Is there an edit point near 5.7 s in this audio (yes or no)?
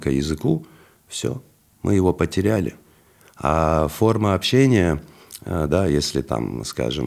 yes